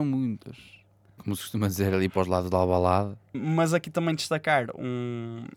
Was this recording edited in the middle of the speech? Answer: yes; 2 cuts; at 1.2 s, 3.3 s

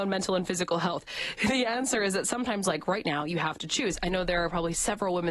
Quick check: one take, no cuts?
yes; 0 cuts

